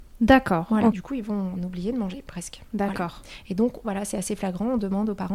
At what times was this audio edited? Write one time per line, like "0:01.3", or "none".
0:00.9
0:03.8